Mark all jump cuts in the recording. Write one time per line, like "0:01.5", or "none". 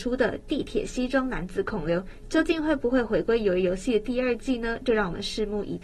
none